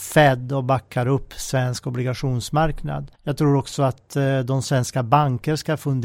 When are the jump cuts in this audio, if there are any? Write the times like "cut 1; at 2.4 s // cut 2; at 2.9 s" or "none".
cut 1; at 3.1 s